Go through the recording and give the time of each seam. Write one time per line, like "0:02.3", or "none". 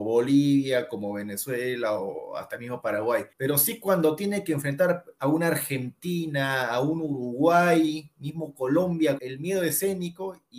0:03.3
0:09.2